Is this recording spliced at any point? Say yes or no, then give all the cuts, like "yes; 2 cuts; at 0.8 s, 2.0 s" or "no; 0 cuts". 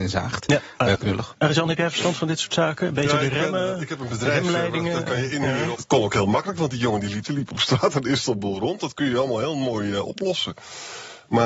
yes; 3 cuts; at 0.9 s, 5.7 s, 7.2 s